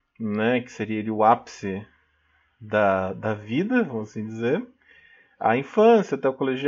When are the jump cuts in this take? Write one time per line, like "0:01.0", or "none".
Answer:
none